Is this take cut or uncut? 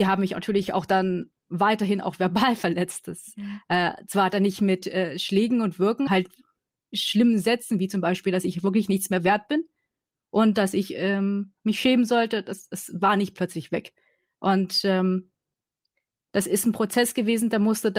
cut